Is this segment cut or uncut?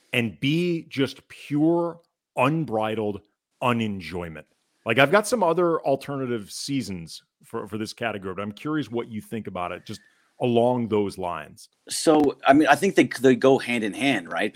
uncut